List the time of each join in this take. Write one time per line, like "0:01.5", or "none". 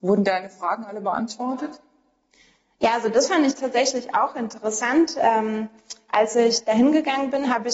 none

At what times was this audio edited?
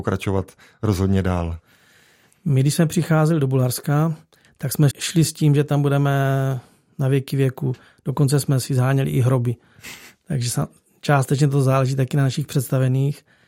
0:04.9

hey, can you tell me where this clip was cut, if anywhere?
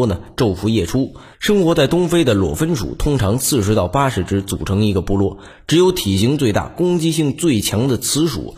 0:01.3

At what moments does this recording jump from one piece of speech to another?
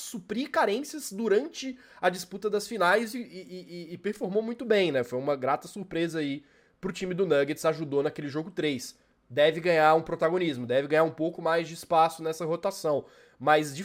none

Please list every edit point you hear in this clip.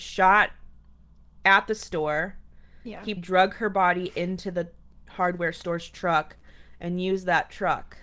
0:03.2

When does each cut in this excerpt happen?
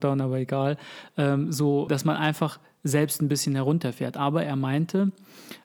0:01.9

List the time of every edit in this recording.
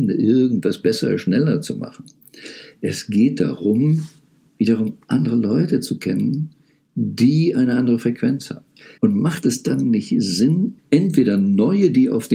0:09.0
0:10.8

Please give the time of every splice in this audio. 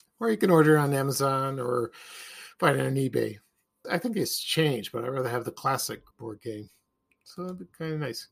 0:03.8
0:06.1

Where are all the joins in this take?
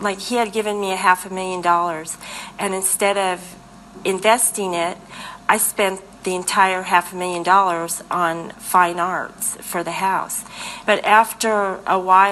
0:08.5
0:10.8

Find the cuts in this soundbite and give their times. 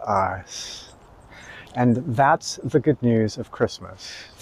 0:01.7

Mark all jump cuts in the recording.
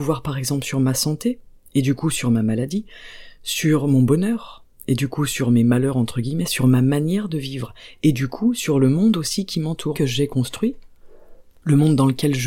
0:06.5
0:09.9

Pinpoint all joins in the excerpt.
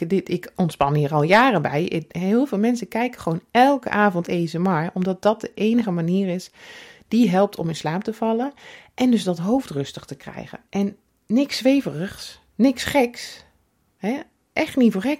0:10.7

